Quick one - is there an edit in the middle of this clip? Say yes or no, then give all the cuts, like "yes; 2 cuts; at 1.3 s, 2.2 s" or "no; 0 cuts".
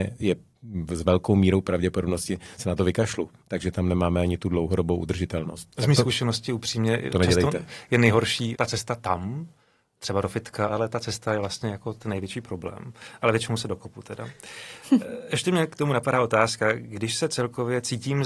yes; 2 cuts; at 8.5 s, 10.7 s